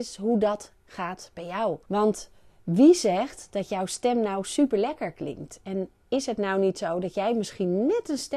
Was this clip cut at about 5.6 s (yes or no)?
no